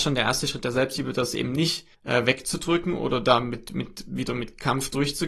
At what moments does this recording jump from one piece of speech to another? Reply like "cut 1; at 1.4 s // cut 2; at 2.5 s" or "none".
cut 1; at 1.9 s